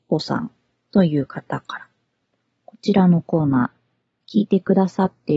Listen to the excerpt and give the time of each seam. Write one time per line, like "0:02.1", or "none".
0:02.6